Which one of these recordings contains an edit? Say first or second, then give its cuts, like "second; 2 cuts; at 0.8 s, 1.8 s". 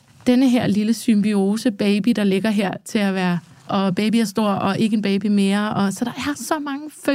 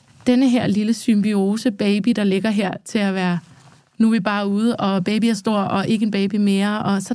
first; 1 cut; at 3.7 s